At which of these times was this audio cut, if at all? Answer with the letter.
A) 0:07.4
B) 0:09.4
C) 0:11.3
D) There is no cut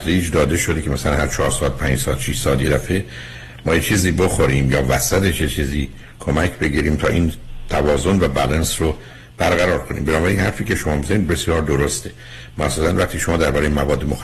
C